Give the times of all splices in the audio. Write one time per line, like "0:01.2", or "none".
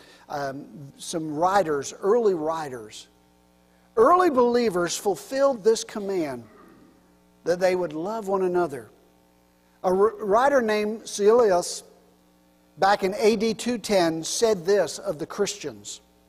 0:00.9